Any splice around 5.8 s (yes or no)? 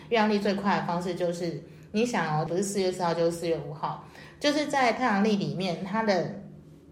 no